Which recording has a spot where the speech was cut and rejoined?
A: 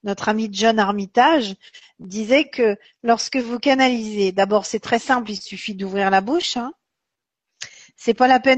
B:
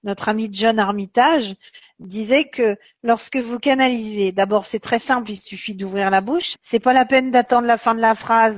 B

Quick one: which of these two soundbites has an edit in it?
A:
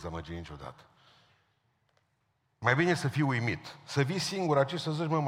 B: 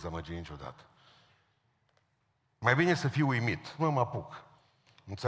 B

